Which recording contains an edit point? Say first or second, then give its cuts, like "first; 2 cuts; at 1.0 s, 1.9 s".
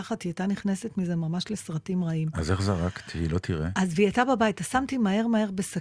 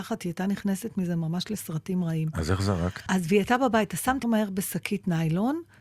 second; 2 cuts; at 3.1 s, 4.2 s